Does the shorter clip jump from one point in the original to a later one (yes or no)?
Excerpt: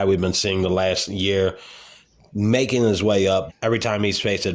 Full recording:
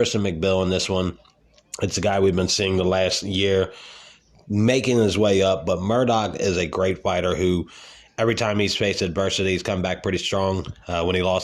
yes